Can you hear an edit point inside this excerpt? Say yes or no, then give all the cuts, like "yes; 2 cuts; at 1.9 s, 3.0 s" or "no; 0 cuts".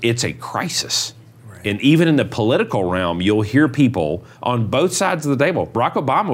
no; 0 cuts